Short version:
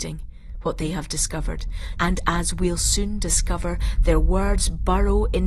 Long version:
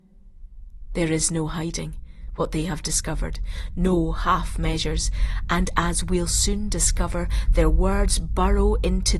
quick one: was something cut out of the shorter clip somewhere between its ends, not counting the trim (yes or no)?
yes